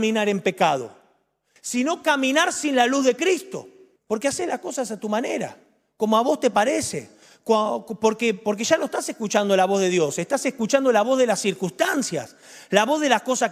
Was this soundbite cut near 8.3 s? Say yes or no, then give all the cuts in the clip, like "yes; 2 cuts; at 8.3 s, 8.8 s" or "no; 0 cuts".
no; 1 cut; at 4.0 s